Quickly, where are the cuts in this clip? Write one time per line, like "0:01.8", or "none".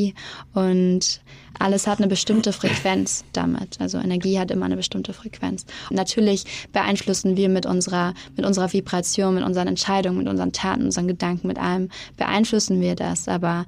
0:05.9